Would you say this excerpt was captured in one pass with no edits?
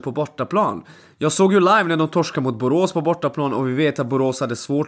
yes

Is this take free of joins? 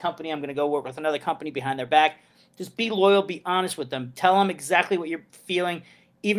yes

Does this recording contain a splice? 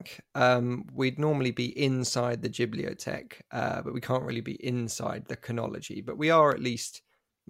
no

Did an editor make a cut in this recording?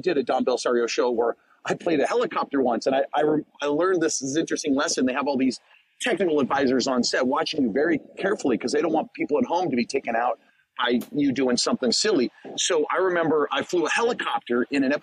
yes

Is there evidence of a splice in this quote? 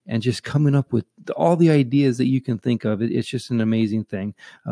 no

